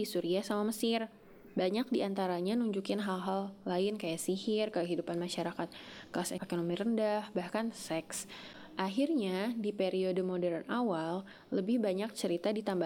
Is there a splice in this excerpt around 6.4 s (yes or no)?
yes